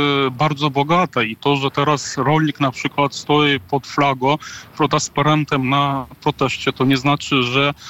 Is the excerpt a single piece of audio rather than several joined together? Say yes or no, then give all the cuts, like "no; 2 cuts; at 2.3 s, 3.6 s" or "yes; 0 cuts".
yes; 0 cuts